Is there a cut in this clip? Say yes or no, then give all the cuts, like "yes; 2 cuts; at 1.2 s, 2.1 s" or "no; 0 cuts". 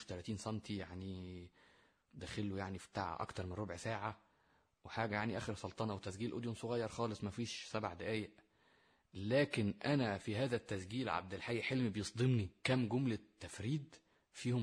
no; 0 cuts